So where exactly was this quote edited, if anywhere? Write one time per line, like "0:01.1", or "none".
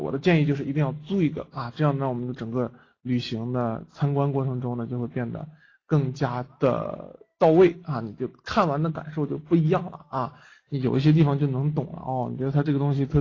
none